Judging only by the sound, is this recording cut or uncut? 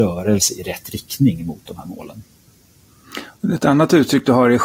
uncut